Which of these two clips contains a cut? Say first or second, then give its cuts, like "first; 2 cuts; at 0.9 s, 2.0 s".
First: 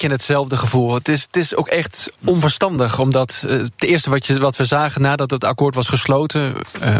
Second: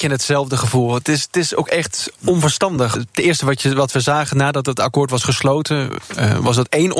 second; 1 cut; at 3.0 s